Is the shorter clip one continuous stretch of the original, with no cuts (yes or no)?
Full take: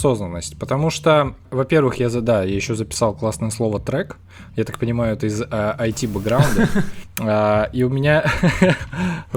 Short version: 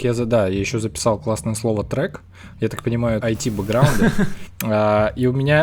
no